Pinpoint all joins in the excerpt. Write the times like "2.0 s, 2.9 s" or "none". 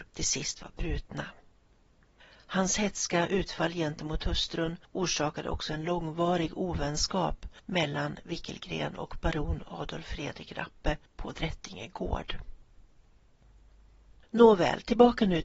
none